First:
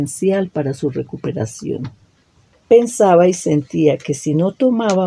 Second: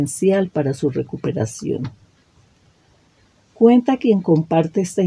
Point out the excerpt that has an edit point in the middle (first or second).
first